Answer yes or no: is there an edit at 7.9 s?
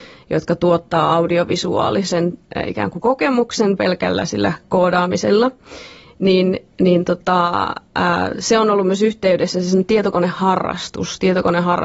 no